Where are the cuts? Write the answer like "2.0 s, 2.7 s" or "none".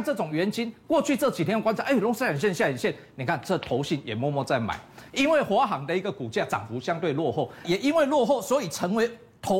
5.1 s, 7.6 s